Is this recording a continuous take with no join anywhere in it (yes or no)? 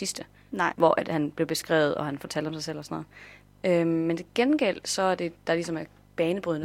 yes